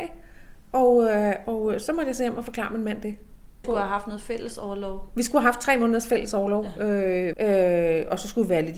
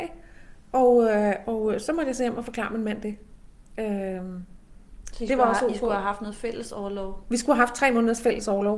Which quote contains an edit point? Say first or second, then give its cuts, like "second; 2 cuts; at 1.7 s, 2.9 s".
first; 2 cuts; at 3.6 s, 7.3 s